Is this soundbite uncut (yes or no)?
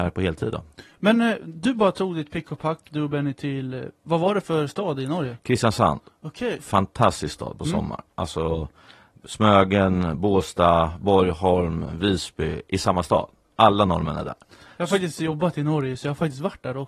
yes